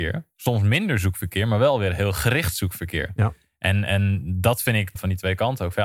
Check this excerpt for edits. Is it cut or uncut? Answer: cut